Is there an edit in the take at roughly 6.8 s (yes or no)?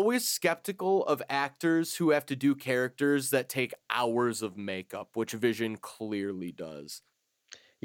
no